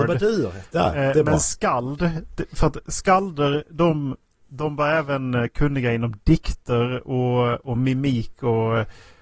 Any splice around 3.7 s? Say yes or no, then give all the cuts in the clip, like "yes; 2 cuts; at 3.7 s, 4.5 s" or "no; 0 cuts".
no; 0 cuts